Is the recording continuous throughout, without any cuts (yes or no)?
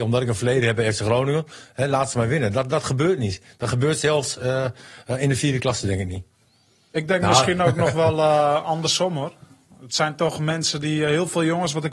yes